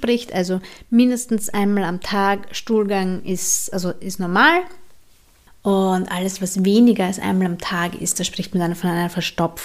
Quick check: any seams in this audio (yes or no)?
no